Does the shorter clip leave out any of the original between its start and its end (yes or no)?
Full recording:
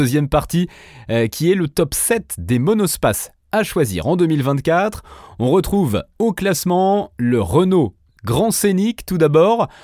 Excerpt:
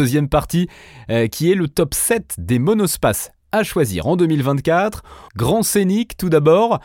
yes